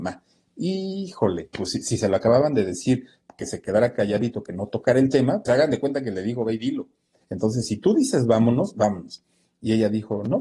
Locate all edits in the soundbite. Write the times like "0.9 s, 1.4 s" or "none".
5.4 s, 7.2 s